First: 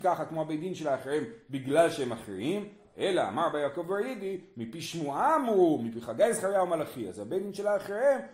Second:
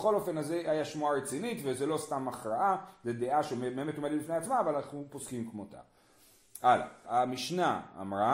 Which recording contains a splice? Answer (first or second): second